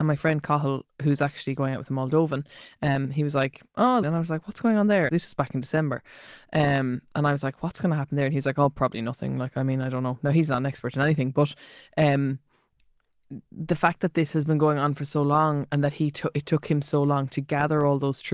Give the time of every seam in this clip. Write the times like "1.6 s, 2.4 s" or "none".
4.0 s, 5.1 s